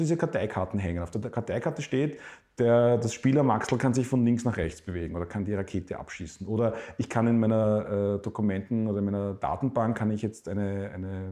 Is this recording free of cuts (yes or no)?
yes